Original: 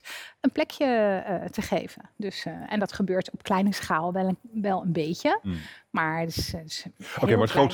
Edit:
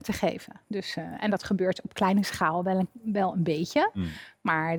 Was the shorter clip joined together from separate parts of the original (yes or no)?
no